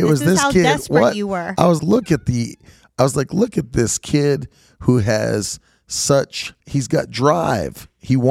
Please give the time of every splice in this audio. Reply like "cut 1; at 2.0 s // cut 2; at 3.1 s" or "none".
cut 1; at 1.8 s // cut 2; at 6.6 s